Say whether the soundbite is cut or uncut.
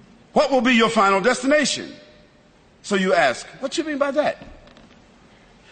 uncut